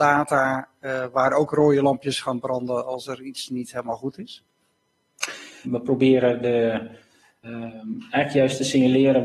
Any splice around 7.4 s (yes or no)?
yes